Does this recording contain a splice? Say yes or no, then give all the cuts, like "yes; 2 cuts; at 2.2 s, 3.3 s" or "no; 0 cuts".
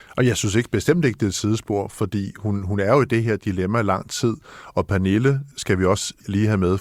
no; 0 cuts